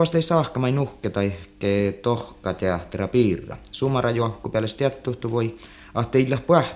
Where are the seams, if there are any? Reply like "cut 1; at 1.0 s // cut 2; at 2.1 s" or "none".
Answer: none